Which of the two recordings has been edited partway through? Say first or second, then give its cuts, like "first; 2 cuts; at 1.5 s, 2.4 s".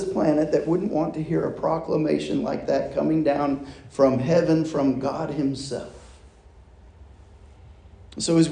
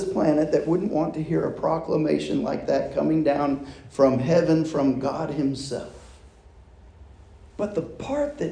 second; 1 cut; at 7.5 s